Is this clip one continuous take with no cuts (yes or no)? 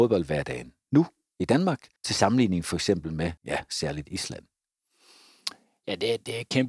no